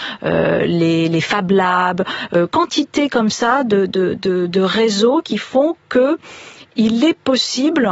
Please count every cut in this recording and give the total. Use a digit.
0